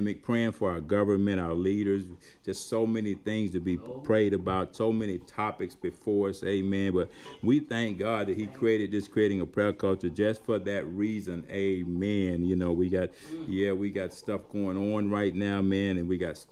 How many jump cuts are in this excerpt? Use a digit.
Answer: 0